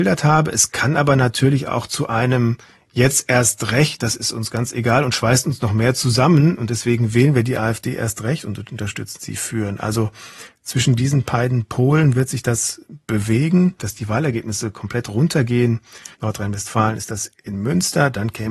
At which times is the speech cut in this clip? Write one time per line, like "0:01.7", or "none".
0:13.8
0:16.1